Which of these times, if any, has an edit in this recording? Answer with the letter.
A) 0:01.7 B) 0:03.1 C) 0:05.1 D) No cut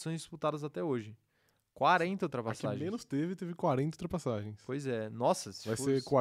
D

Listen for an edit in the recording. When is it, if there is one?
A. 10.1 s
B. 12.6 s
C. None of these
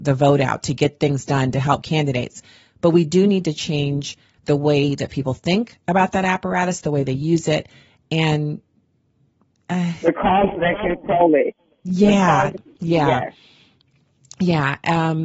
B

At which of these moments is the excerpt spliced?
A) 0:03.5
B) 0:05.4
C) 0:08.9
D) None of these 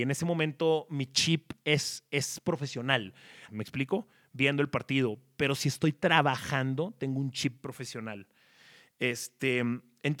A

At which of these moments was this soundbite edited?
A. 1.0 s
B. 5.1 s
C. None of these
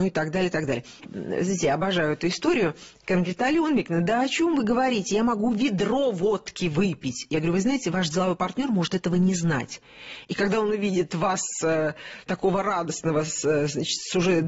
A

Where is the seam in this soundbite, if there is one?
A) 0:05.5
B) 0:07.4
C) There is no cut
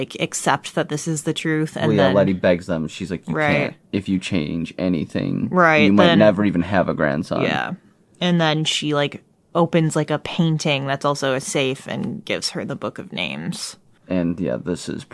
C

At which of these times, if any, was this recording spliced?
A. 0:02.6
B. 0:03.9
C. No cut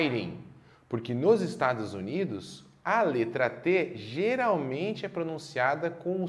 C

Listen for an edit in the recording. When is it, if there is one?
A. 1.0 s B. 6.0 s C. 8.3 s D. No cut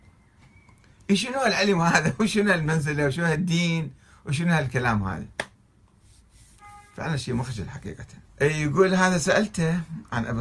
C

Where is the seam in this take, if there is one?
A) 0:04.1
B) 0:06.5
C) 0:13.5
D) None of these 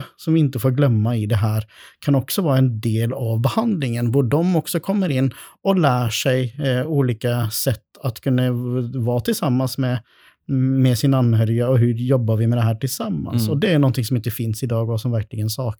D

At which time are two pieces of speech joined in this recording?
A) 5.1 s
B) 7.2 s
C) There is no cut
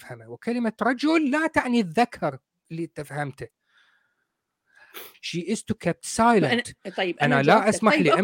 A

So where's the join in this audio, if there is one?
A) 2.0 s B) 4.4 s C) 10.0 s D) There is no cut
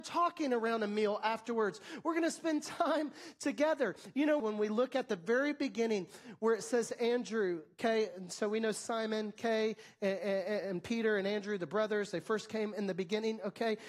B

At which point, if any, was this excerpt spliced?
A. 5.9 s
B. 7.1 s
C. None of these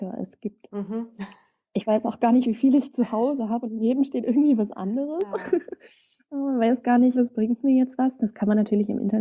B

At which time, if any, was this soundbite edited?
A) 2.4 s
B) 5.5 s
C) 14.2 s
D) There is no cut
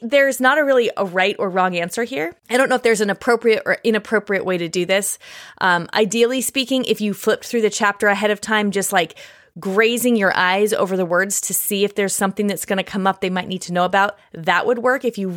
A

